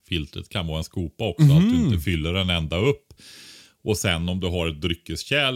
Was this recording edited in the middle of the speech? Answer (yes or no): no